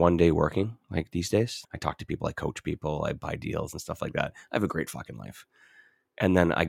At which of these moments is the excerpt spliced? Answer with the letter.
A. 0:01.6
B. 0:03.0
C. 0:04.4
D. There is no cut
A